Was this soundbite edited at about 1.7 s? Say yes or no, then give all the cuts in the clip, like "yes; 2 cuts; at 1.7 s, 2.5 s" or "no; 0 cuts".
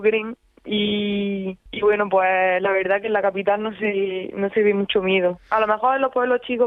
yes; 1 cut; at 1.7 s